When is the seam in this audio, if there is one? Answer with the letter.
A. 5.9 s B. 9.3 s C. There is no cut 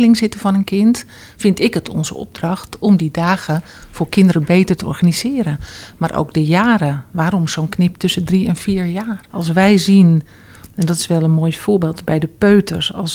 B